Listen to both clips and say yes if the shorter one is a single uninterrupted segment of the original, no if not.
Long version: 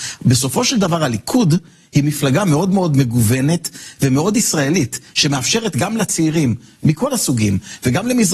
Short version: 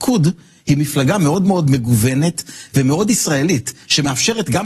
yes